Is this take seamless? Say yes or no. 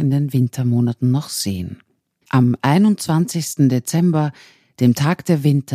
no